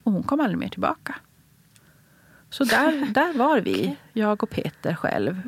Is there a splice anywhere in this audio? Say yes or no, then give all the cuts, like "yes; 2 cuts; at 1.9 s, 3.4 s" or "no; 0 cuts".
no; 0 cuts